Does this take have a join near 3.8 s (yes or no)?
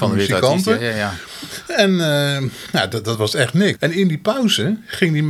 yes